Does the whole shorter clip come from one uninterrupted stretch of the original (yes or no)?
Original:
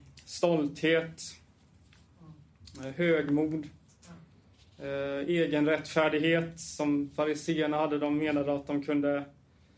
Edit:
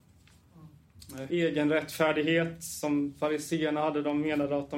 no